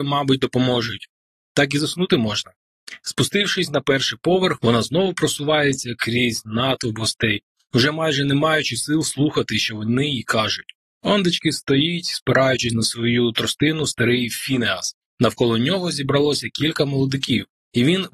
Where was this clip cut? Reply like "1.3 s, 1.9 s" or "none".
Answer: 1.4 s